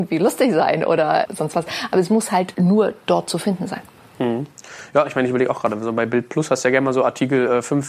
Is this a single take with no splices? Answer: no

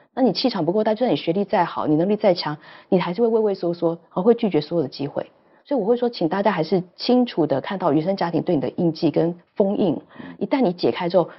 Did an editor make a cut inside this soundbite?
no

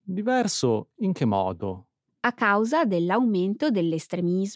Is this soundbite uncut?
no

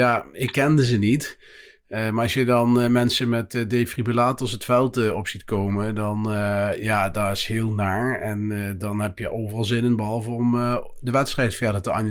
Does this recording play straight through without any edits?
yes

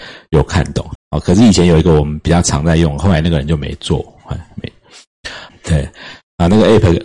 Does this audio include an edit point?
yes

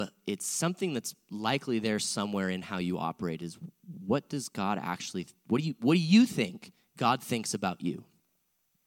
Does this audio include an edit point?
no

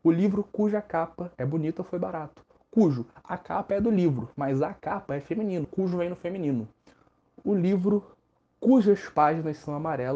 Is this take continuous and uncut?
no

